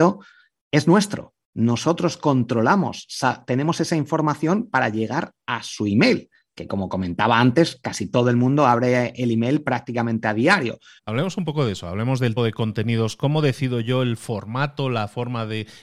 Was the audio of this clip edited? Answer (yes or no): yes